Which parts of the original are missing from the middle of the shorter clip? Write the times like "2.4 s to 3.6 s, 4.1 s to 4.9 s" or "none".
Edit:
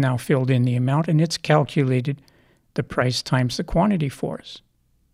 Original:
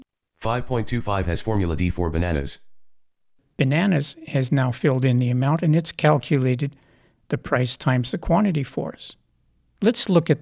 none